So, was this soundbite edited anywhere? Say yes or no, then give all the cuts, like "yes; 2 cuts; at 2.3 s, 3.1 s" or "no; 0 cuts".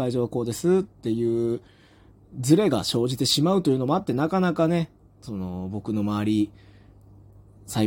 no; 0 cuts